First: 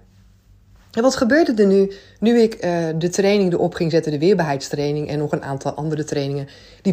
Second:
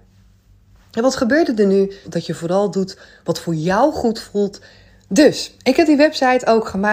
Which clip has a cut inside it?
second; 2 cuts; at 2.0 s, 4.9 s

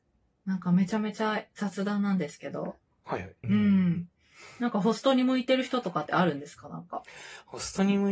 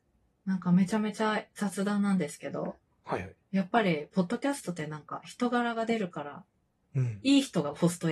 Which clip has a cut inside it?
first; 1 cut; at 3.4 s

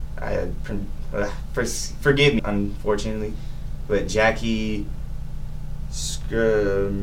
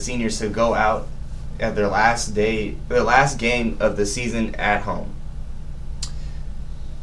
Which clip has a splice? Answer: first; 1 cut; at 2.4 s

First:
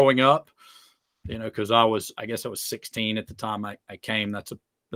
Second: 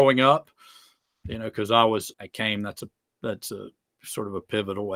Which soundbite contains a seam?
second; 1 cut; at 2.1 s

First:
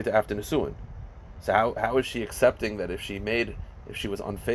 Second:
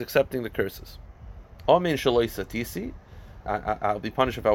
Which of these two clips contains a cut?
second; 2 cuts; at 1.6 s, 3.4 s

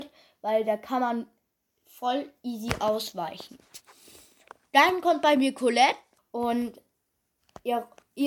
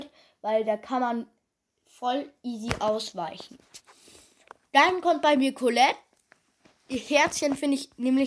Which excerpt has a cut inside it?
first; 1 cut; at 6.2 s

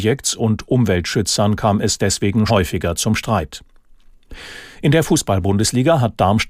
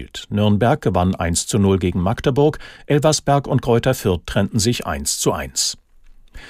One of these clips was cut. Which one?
first; 1 cut; at 2.5 s

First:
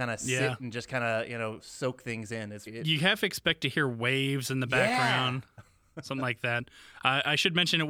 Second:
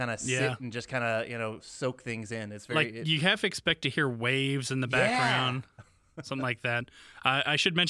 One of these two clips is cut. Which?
first; 1 cut; at 2.7 s

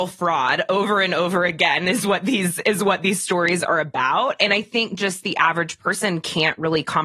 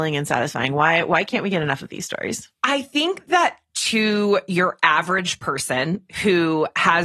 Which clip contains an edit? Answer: second; 1 cut; at 2.5 s

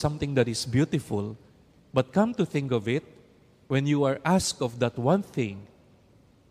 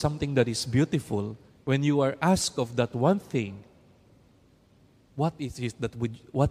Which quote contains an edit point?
second; 1 cut; at 1.6 s

